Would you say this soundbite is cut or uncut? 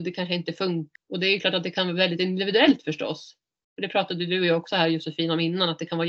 cut